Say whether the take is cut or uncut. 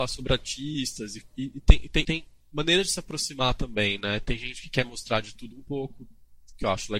cut